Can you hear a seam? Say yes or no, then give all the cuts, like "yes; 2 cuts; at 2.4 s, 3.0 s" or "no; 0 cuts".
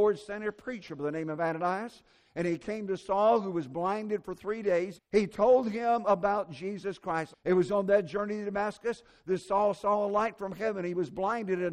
yes; 2 cuts; at 5.0 s, 7.3 s